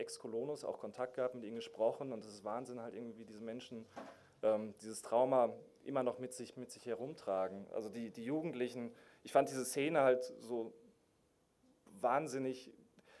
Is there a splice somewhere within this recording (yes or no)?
no